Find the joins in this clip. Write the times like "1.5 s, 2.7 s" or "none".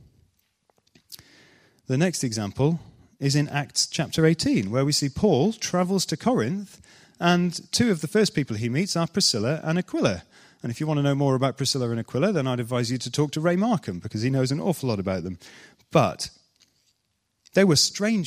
none